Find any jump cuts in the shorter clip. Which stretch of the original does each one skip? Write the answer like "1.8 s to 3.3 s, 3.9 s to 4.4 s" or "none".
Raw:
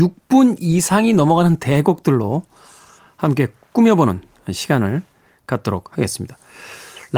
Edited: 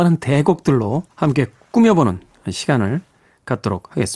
2.5 s to 3.1 s